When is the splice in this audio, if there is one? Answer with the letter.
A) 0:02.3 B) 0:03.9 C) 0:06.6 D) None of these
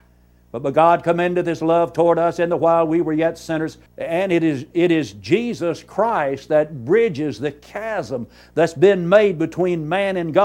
B